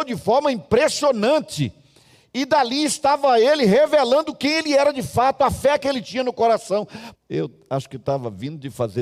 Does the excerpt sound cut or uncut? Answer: cut